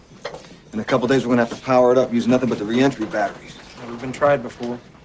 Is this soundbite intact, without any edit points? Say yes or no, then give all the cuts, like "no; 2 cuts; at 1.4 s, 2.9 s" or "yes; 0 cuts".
yes; 0 cuts